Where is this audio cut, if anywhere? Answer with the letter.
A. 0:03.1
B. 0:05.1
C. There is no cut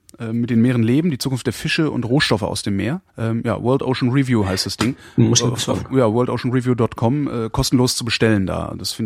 A